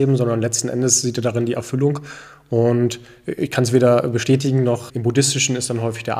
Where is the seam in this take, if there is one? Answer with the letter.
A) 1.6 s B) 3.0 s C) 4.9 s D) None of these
C